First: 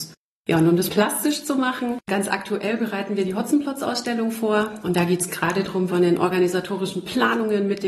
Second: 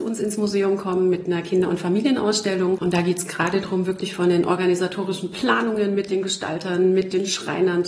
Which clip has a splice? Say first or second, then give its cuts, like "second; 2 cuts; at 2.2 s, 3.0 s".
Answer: first; 2 cuts; at 4.8 s, 5.9 s